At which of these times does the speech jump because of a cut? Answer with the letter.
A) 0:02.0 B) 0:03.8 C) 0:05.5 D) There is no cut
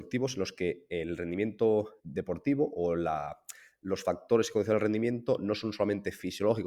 A